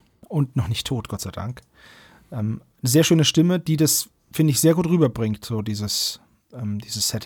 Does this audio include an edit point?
no; 0 cuts

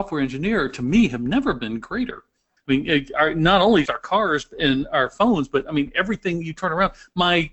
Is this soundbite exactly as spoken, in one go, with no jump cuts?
no; 2 cuts; at 2.6 s, 3.8 s

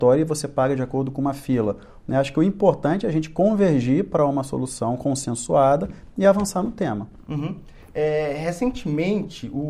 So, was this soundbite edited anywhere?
yes; 1 cut; at 2.0 s

